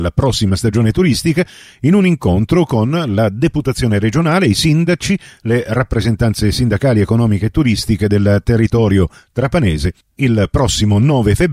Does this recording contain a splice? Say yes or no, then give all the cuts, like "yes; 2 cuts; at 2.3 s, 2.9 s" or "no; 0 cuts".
no; 0 cuts